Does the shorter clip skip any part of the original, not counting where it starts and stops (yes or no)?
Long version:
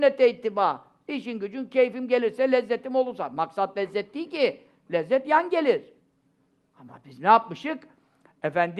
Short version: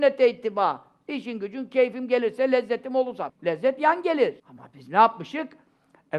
yes